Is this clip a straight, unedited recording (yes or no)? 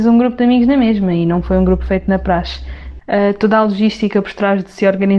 no